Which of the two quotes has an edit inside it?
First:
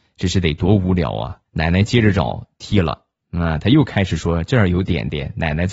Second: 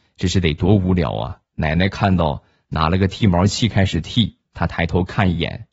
first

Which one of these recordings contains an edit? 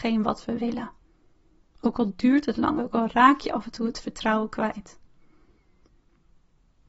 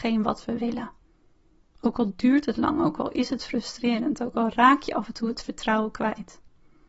first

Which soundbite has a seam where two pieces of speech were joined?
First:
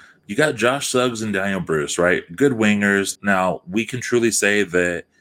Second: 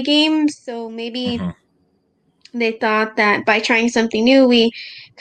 first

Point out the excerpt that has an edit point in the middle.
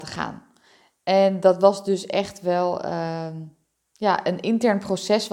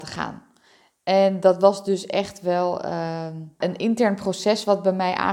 second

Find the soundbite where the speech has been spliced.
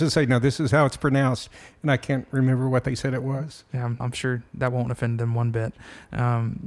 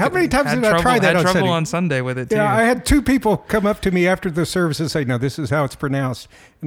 first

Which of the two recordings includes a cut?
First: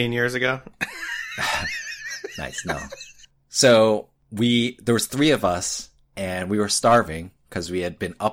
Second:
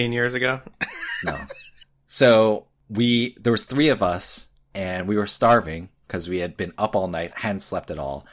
second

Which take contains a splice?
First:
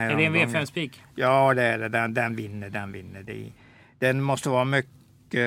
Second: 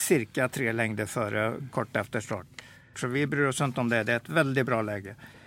second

